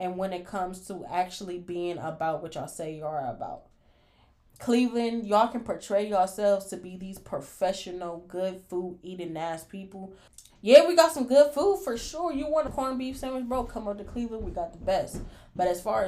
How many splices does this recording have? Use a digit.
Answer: 1